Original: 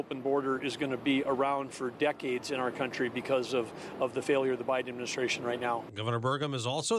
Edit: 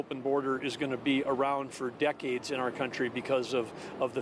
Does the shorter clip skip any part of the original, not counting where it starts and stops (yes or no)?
no